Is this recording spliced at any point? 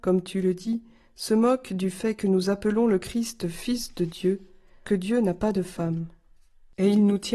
yes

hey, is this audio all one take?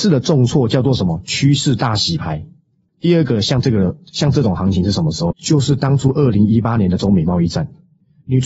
no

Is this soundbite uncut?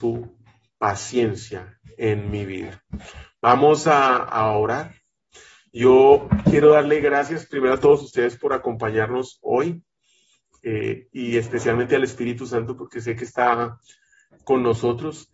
yes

